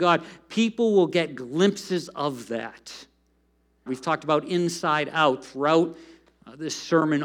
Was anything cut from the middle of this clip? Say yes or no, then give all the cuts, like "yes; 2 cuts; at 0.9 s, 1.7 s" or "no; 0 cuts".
yes; 1 cut; at 3.9 s